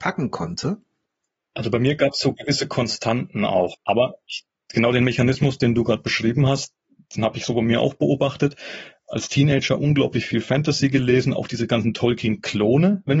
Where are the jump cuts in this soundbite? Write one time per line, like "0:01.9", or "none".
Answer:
0:03.7

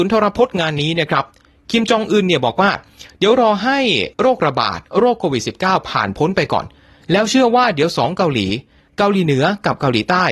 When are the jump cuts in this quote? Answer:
0:04.1

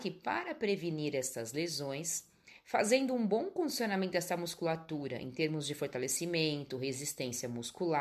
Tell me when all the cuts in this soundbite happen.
none

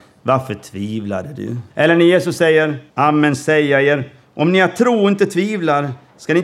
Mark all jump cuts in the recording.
0:01.7
0:02.9

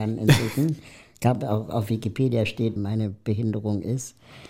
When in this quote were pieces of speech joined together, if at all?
0:02.8

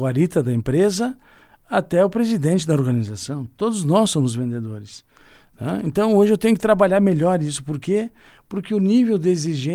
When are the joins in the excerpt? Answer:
none

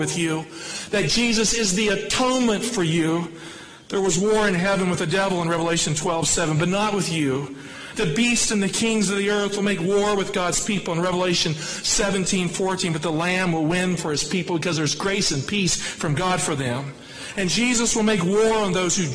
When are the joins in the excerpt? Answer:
0:07.9

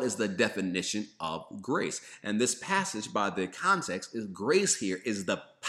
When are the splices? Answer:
none

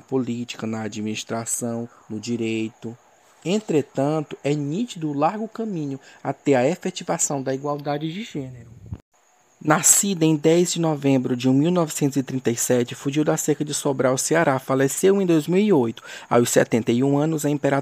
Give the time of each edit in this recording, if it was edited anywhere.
none

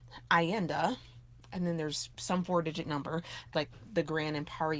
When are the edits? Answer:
0:03.5

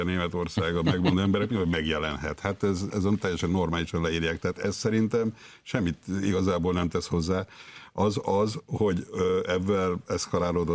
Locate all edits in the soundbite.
none

